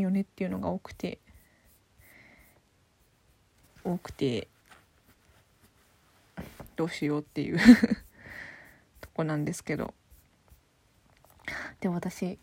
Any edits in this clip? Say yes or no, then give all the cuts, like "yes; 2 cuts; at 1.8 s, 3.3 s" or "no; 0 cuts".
no; 0 cuts